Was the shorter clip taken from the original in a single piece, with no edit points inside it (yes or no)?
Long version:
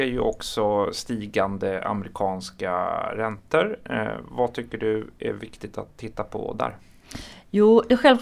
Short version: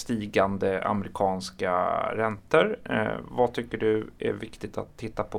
yes